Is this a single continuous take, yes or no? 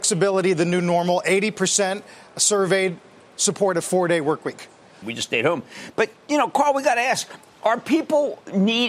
no